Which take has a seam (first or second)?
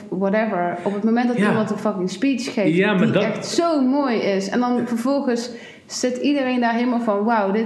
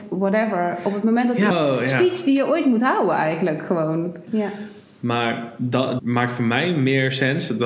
second